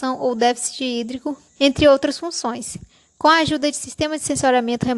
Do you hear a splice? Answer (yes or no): yes